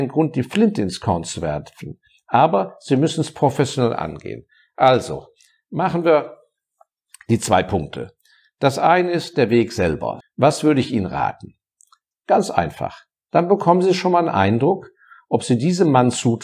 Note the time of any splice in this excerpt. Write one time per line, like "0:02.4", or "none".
0:10.2
0:12.1